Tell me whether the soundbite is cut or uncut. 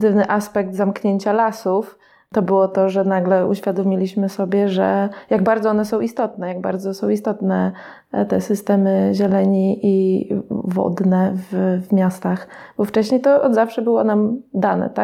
uncut